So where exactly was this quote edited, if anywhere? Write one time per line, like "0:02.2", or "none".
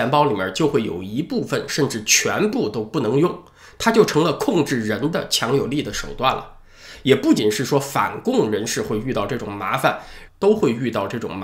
0:07.4
0:10.3